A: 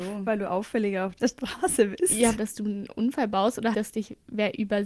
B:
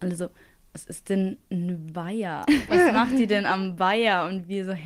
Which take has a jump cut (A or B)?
A